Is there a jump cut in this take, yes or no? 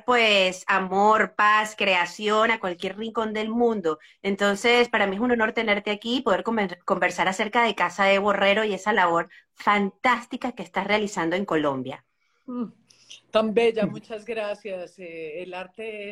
no